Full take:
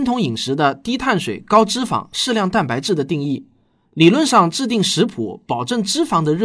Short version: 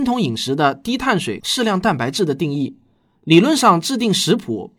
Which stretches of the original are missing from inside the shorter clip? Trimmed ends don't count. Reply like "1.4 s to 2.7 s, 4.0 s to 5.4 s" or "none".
1.4 s to 2.1 s